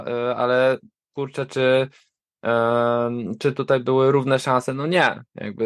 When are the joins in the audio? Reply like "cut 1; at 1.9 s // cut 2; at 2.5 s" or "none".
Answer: none